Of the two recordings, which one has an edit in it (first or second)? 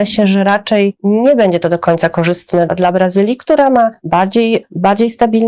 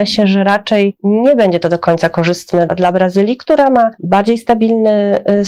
second